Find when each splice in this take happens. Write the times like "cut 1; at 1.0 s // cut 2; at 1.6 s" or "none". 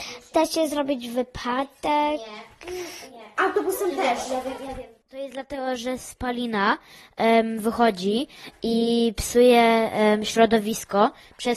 none